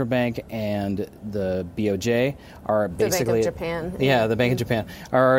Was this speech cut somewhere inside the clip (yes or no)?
no